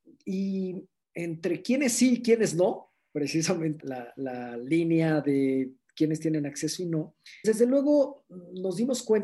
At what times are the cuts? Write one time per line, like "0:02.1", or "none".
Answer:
0:03.8
0:07.4